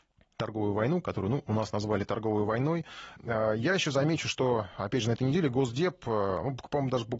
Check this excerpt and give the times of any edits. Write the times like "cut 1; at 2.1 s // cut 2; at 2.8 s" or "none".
cut 1; at 3.2 s

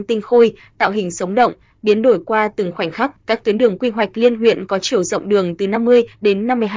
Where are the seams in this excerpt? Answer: cut 1; at 3.2 s

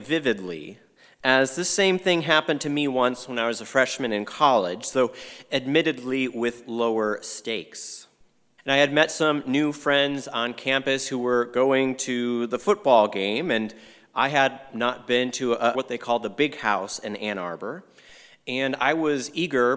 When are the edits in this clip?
cut 1; at 8.6 s // cut 2; at 15.7 s

